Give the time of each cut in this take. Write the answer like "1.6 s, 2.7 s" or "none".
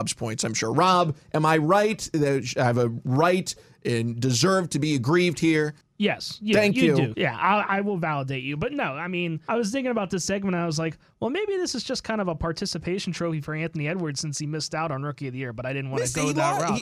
7.1 s